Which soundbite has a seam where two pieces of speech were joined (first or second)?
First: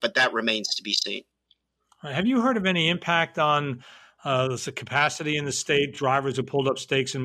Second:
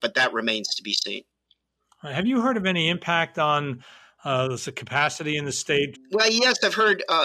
second